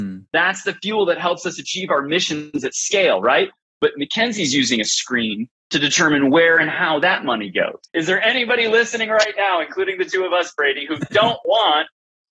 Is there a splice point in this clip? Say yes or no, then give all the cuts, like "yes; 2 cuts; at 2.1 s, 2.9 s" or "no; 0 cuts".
yes; 1 cut; at 7.8 s